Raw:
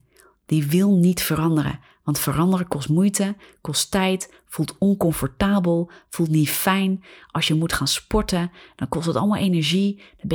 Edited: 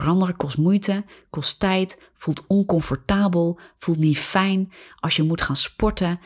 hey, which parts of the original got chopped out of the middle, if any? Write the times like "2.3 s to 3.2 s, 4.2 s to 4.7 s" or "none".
none